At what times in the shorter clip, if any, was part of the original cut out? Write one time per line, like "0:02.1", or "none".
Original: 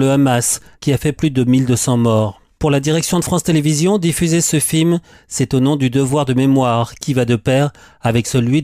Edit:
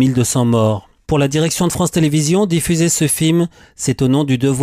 none